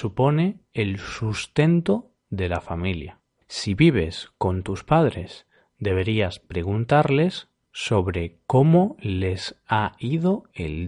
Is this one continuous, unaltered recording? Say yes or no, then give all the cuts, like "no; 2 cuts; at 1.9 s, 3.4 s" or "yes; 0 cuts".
no; 1 cut; at 3.4 s